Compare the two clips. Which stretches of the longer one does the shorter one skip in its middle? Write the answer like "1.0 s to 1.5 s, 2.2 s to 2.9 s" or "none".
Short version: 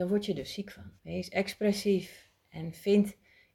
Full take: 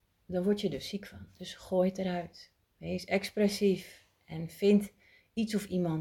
1.3 s to 2.7 s